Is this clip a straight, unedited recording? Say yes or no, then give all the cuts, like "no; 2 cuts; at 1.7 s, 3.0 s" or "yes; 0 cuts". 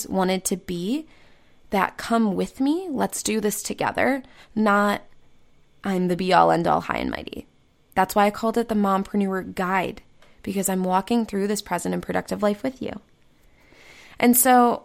yes; 0 cuts